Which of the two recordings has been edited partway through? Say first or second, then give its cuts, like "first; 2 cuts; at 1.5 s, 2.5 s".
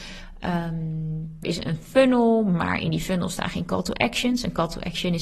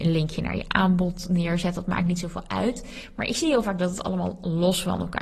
first; 1 cut; at 1.4 s